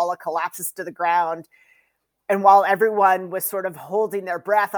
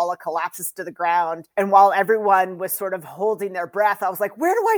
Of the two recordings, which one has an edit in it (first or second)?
second